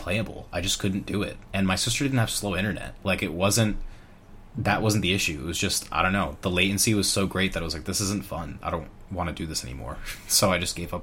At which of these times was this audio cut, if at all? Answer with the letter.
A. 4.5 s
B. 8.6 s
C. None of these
A